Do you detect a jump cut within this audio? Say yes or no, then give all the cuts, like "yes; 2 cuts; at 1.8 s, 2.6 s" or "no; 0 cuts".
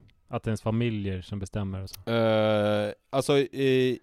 no; 0 cuts